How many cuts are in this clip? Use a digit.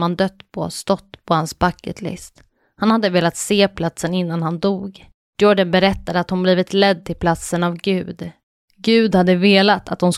0